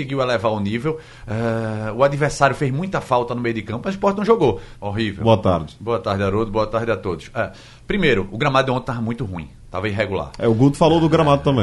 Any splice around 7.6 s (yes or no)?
no